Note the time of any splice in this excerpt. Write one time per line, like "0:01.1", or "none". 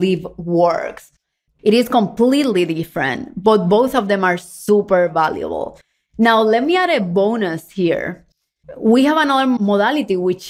0:01.5